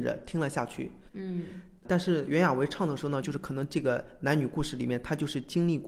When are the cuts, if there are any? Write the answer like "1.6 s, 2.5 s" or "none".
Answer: 1.1 s, 3.2 s